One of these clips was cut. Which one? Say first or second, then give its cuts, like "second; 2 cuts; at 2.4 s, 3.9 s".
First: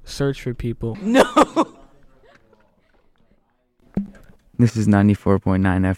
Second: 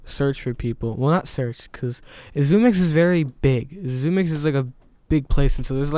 first; 1 cut; at 0.9 s